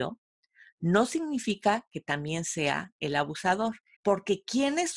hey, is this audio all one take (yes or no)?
no